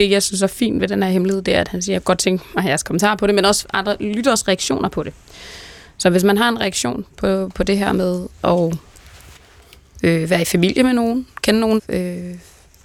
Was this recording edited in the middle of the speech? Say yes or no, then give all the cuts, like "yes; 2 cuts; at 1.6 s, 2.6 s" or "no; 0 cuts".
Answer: yes; 1 cut; at 11.8 s